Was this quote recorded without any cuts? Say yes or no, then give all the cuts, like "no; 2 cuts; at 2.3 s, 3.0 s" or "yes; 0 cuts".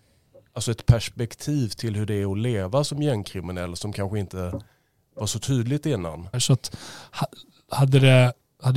no; 1 cut; at 6.3 s